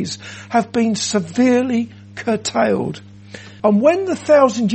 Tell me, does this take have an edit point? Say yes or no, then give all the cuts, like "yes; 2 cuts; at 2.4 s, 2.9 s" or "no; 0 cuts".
yes; 1 cut; at 3.6 s